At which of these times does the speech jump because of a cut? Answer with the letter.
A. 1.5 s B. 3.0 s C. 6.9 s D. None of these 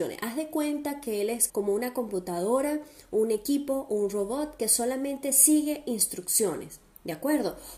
A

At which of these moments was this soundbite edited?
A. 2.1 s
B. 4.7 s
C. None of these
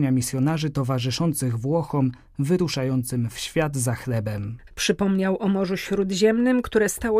B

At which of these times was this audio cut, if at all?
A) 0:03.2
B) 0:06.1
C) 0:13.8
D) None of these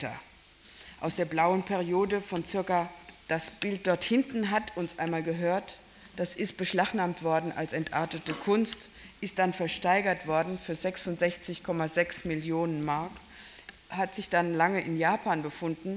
A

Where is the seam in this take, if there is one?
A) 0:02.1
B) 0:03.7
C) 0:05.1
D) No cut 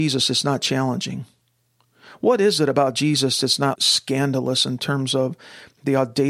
B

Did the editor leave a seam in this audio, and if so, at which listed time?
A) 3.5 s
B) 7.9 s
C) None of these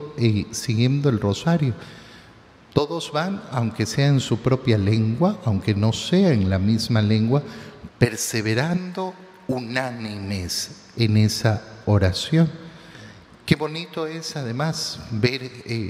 B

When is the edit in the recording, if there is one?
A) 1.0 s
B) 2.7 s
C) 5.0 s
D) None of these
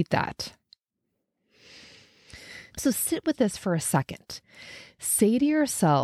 B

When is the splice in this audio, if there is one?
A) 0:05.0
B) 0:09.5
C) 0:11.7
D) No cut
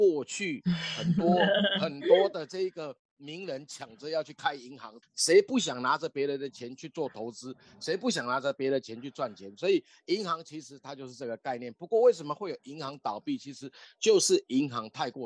A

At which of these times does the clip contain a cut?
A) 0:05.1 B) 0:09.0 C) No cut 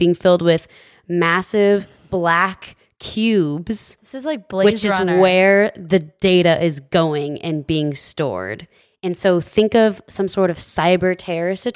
C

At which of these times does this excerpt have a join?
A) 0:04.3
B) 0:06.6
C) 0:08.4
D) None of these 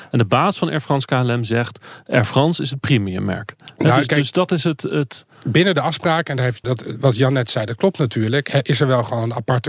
B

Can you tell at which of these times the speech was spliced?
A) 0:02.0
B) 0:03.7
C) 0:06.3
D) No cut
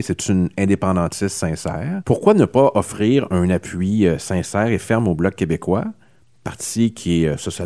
A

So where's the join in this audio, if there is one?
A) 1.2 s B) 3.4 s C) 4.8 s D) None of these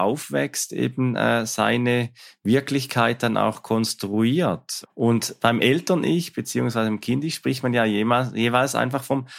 C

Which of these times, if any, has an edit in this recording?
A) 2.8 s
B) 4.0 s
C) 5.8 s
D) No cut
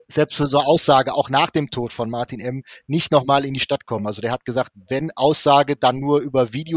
D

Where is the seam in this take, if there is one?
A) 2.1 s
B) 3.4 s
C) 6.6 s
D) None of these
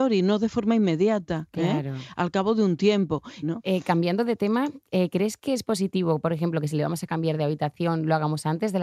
B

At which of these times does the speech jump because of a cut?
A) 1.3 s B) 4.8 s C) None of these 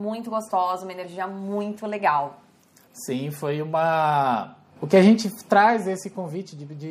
B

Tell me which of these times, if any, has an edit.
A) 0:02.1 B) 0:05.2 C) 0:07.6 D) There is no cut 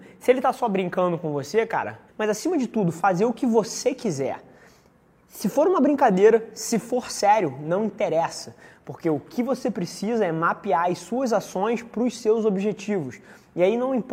A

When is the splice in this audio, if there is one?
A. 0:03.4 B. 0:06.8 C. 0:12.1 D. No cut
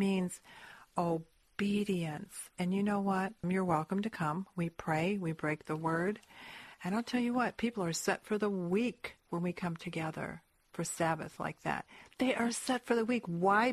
A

